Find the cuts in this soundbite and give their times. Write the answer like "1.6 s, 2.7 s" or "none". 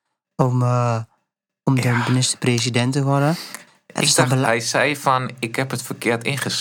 none